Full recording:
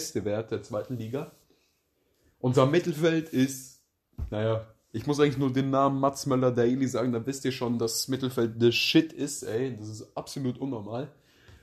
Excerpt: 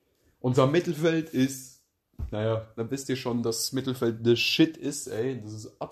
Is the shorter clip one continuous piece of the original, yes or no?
no